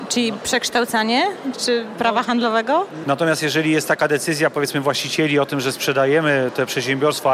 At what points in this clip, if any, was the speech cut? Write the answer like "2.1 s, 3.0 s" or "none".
1.5 s, 3.0 s